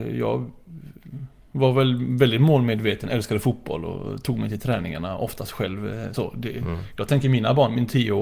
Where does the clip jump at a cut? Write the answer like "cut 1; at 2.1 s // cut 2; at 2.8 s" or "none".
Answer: none